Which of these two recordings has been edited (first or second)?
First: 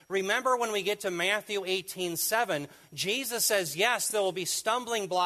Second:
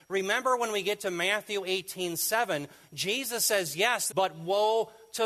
second